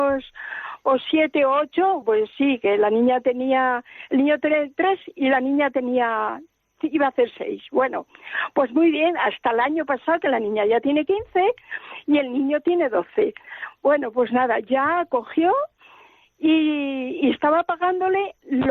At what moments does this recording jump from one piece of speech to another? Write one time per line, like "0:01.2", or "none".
0:02.0